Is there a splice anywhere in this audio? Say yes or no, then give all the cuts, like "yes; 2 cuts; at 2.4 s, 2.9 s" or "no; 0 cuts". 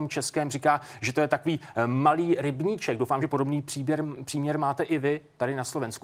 no; 0 cuts